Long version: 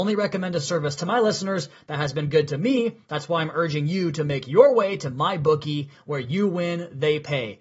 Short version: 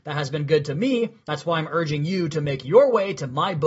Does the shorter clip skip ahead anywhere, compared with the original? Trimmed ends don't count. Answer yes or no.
no